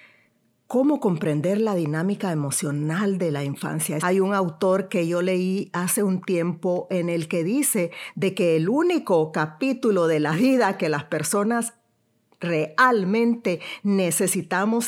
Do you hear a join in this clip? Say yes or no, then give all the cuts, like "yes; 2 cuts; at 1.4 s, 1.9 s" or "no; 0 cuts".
yes; 1 cut; at 4.0 s